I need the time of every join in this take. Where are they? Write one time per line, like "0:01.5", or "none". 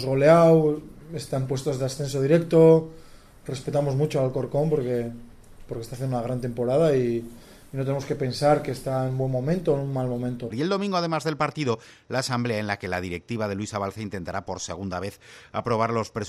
0:10.5

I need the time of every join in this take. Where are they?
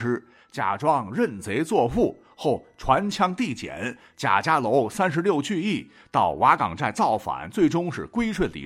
none

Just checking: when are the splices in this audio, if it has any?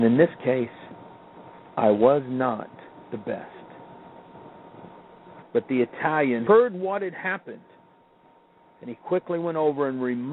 0:03.0
0:05.4
0:06.5

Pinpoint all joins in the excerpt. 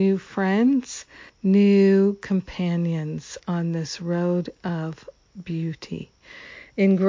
0:01.3

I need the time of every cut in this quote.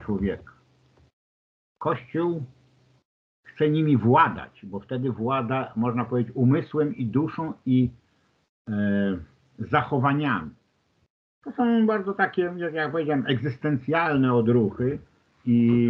none

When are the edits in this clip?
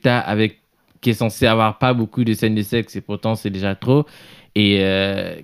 none

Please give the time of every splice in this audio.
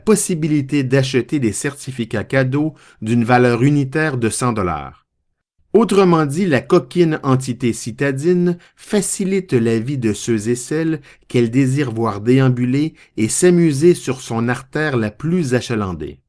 0:05.6

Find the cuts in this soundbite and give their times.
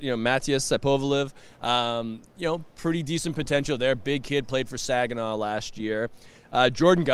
none

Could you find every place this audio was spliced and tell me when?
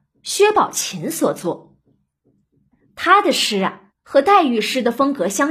0:03.9

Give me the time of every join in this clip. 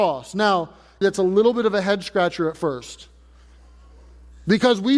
0:01.0

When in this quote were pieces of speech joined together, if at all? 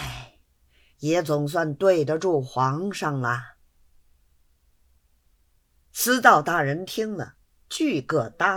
0:00.9

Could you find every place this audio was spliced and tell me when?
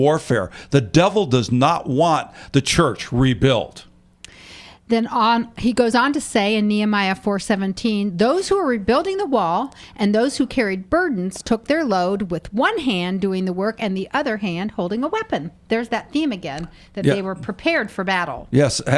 none

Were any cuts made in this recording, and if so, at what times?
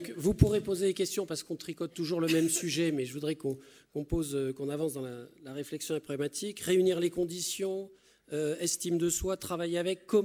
none

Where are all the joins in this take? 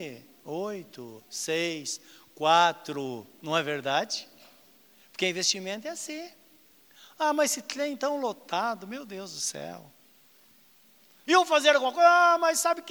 0:11.3

